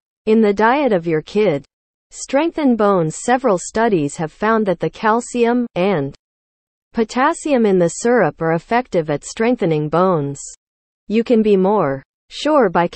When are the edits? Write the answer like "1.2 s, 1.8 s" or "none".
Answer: 5.7 s, 10.9 s